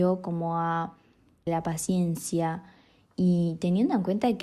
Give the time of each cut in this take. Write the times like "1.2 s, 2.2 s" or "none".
1.5 s